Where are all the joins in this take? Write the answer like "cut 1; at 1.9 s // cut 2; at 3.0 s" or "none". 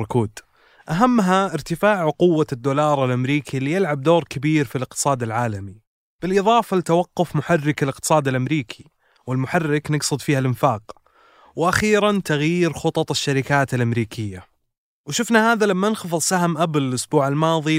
none

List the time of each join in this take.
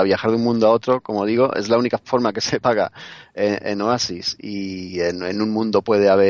none

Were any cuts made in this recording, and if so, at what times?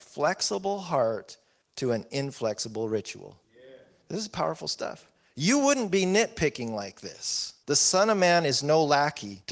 cut 1; at 7.6 s

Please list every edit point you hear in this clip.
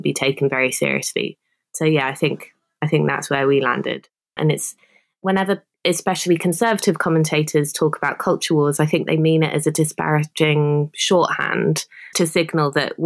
cut 1; at 4.4 s // cut 2; at 5.7 s // cut 3; at 12.1 s

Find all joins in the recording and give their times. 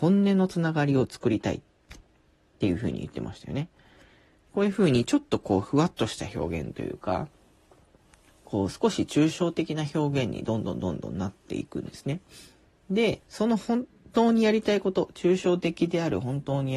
cut 1; at 4.4 s // cut 2; at 13.2 s

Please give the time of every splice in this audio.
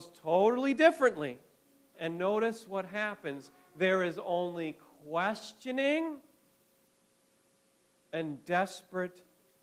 cut 1; at 1.9 s

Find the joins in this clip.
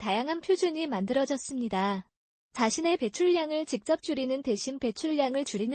cut 1; at 2.3 s

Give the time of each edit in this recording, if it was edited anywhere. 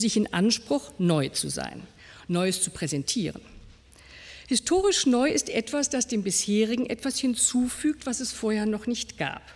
none

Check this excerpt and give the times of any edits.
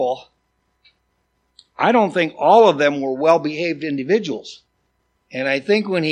cut 1; at 5.2 s

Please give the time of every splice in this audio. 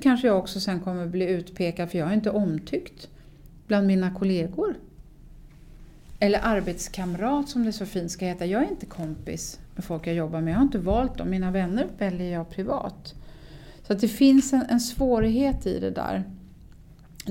none

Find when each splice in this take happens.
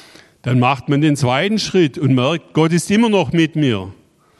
none

